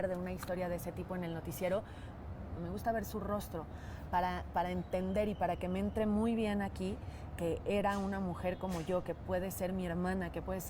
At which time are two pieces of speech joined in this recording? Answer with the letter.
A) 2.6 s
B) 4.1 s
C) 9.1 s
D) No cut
A